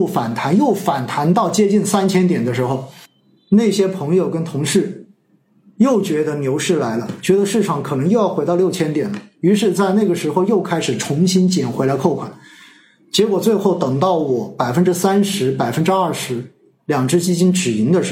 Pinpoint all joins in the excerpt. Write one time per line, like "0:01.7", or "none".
none